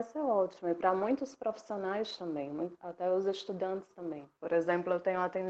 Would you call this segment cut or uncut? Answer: cut